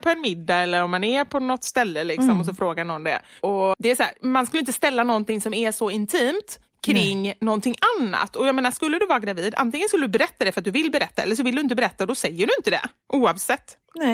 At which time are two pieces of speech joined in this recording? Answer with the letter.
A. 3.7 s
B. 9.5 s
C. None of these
A